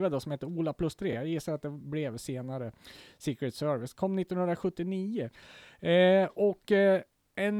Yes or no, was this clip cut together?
no